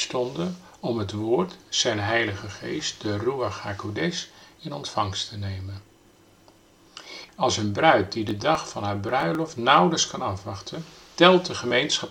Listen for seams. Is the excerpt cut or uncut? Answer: cut